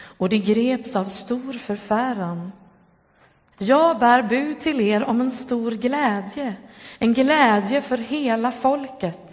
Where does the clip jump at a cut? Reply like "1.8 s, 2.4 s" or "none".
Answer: 3.5 s